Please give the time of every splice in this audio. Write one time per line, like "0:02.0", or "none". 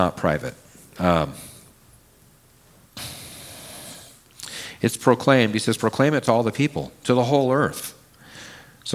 none